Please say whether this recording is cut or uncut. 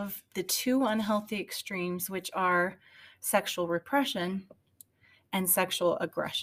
uncut